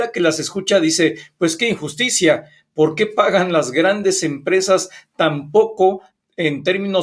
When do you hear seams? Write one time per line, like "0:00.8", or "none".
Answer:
none